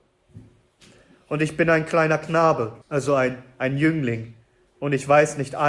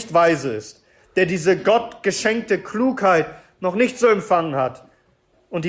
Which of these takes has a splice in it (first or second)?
first